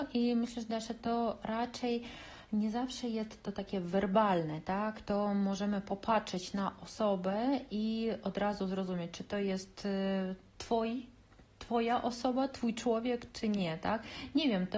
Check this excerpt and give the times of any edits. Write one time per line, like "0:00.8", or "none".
none

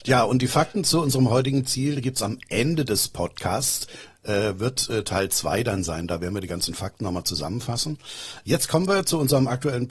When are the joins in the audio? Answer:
none

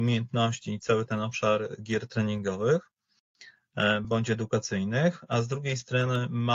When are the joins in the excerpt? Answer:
none

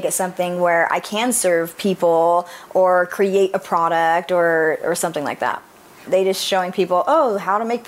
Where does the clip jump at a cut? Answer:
0:06.1

